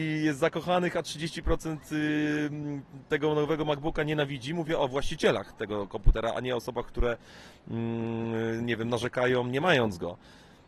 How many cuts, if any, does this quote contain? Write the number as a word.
zero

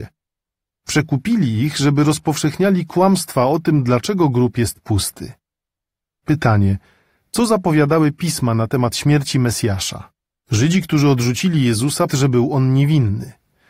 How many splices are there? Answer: three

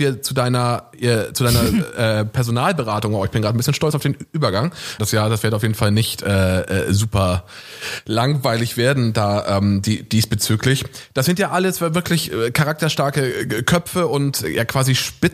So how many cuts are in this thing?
one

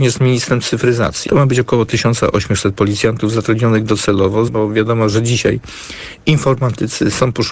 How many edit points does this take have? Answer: two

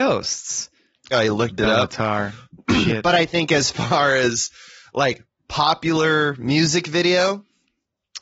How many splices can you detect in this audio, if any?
one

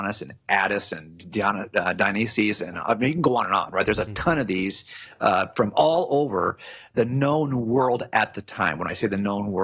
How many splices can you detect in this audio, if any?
zero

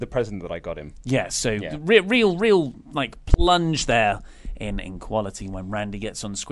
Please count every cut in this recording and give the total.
zero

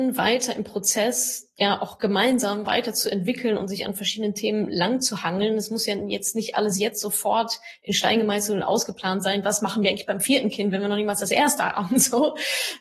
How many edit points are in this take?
zero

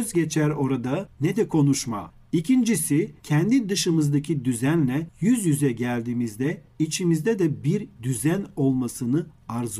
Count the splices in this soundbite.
two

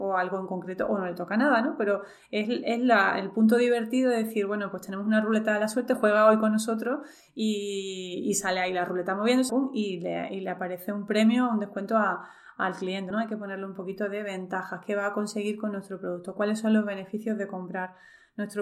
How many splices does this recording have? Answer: two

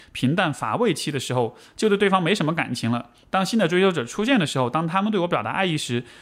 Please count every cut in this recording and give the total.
zero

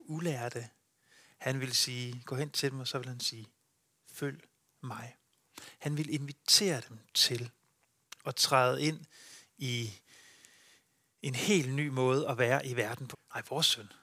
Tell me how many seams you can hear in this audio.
one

